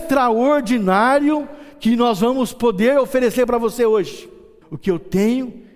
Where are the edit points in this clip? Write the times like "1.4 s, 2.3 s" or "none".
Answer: 4.6 s